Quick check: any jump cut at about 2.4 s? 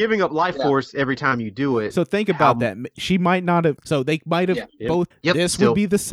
no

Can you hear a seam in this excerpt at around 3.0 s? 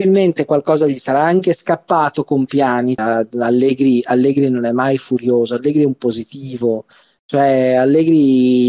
yes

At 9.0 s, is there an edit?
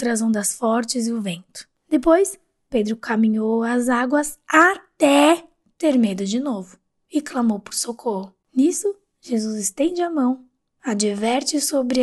no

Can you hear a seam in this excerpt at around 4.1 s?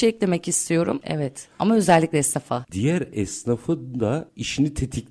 no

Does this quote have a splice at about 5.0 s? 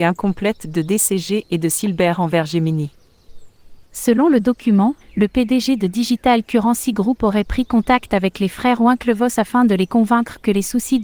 yes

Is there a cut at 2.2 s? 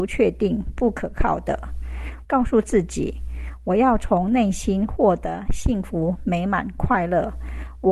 yes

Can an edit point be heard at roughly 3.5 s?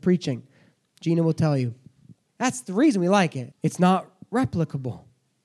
yes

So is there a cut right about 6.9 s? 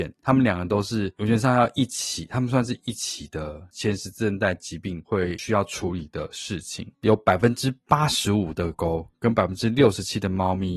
yes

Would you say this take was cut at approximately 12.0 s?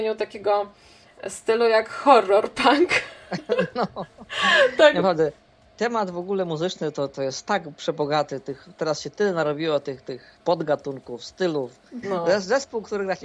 yes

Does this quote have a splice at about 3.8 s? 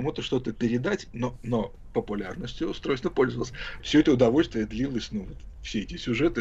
yes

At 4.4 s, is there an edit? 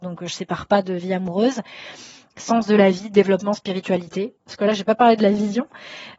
yes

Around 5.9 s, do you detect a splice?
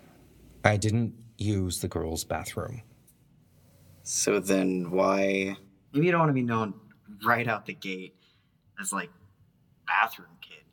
yes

